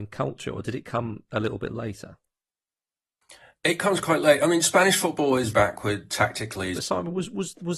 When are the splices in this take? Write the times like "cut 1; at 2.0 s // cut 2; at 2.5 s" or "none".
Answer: cut 1; at 5.5 s // cut 2; at 6.7 s